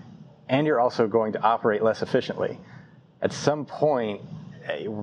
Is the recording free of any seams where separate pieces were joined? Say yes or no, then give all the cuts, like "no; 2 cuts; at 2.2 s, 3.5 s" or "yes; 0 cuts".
yes; 0 cuts